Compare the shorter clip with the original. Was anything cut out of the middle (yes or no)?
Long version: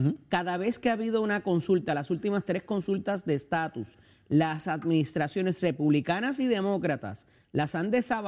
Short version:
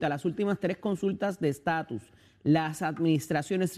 no